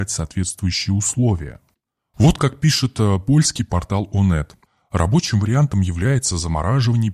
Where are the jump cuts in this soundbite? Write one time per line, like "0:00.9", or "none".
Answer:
none